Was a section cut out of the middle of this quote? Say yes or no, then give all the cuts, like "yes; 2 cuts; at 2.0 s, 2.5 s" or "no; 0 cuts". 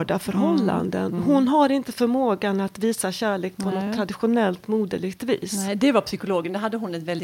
no; 0 cuts